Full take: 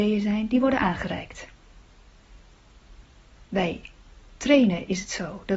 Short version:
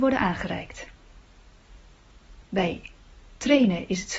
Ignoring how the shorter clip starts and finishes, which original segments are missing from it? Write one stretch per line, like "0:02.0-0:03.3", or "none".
0:03.1-0:03.5